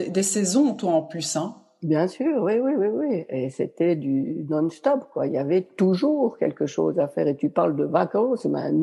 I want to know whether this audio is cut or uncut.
uncut